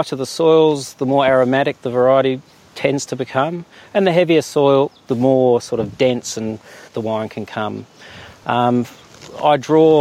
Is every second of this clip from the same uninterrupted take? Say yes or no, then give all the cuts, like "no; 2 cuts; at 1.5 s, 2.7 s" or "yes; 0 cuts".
no; 2 cuts; at 5.1 s, 6.9 s